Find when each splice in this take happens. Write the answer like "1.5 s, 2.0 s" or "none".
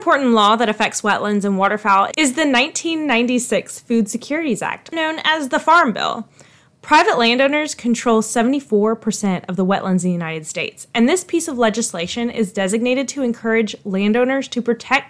4.9 s